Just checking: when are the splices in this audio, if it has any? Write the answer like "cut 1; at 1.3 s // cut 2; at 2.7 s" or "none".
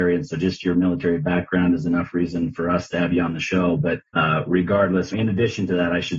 cut 1; at 4.1 s // cut 2; at 5.1 s